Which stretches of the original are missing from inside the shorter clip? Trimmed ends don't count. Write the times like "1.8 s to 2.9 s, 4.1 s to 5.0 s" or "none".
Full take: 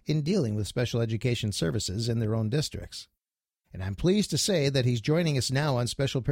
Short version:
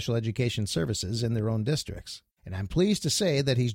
3.2 s to 3.6 s